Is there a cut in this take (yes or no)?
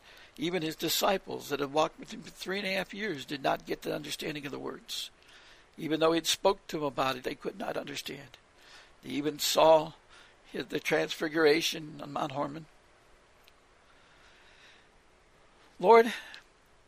yes